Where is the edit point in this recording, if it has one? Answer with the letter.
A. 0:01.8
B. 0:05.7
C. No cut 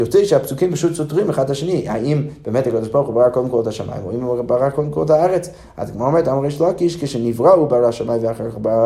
C